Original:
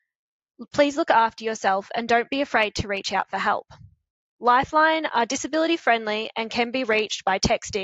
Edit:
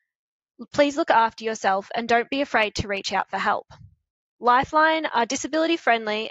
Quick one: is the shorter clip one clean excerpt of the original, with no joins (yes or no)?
yes